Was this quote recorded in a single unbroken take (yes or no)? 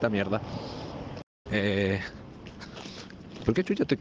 no